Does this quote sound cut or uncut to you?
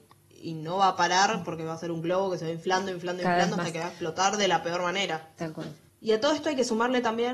uncut